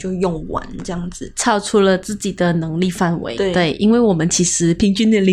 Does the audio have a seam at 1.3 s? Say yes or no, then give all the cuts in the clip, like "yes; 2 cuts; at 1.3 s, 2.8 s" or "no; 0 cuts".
no; 1 cut; at 3.4 s